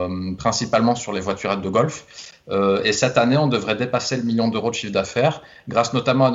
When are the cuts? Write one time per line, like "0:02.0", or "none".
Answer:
none